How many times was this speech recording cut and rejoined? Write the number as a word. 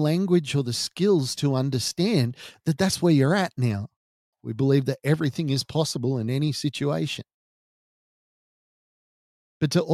one